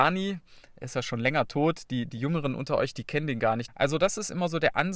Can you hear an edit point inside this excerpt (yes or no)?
yes